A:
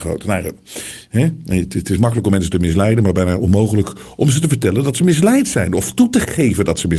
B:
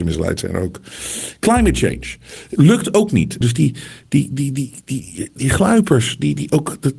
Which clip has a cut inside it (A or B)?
B